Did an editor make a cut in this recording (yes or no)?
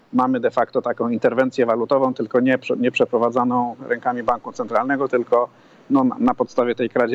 no